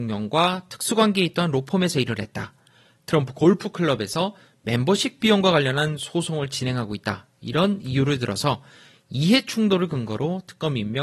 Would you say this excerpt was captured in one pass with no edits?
yes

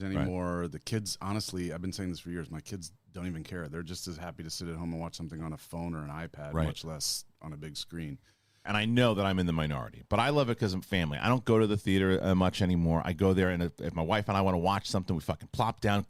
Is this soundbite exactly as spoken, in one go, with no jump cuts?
no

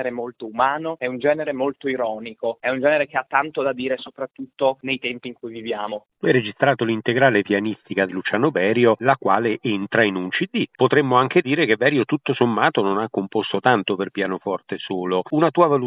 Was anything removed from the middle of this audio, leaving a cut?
yes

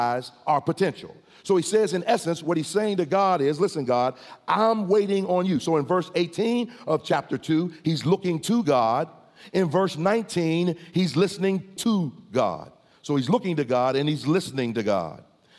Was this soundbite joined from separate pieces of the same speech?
no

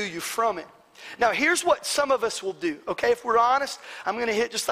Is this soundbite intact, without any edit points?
yes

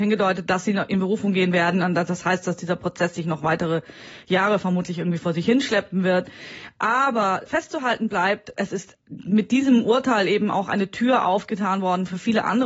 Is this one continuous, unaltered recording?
no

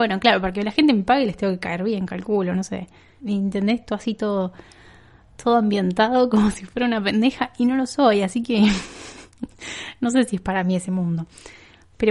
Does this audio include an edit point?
yes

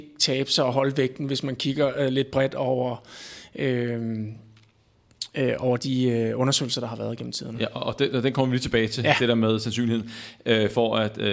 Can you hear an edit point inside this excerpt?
no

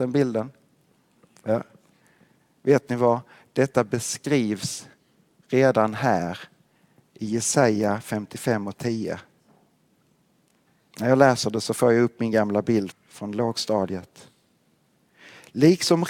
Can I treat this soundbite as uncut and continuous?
no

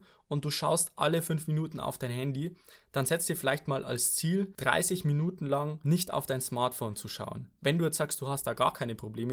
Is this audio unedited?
yes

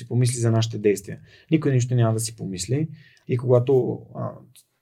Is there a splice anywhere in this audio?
yes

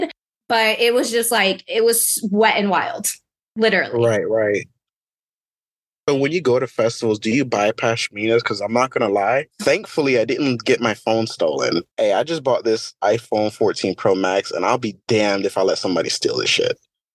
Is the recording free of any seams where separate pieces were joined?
no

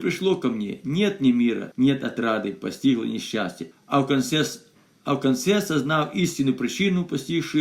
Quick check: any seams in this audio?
yes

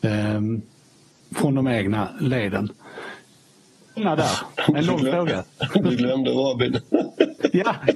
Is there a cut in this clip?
yes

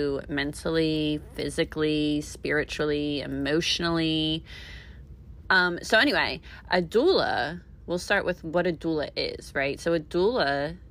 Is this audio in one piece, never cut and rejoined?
no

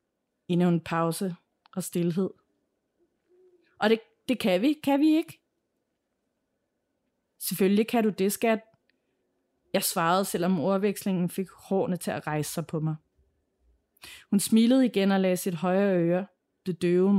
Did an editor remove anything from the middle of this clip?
no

